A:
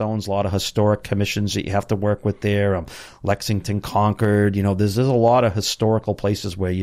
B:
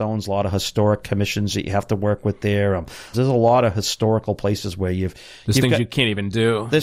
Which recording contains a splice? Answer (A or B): B